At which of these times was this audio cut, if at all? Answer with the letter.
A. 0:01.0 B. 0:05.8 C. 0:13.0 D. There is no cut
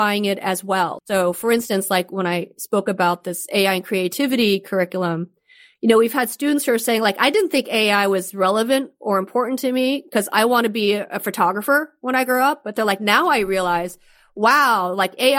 A